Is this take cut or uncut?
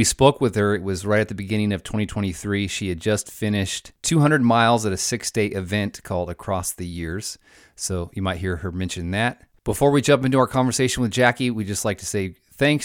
uncut